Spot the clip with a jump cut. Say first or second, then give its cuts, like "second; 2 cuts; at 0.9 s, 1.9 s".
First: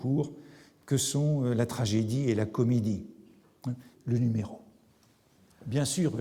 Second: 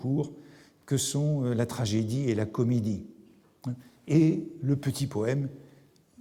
first; 1 cut; at 3.9 s